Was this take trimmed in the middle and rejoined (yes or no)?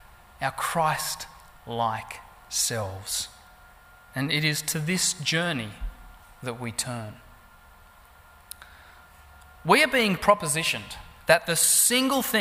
no